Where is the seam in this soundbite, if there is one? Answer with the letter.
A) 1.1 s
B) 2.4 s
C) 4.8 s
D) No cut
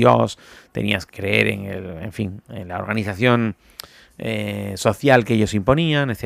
A